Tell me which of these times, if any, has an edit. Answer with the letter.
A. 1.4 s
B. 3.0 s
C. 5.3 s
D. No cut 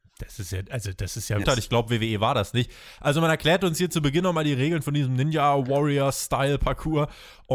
A